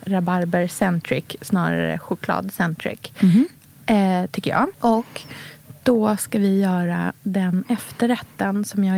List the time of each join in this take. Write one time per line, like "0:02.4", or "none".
0:04.7